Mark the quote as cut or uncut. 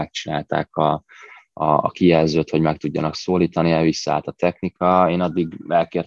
uncut